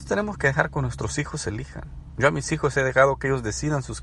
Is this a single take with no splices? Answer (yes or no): yes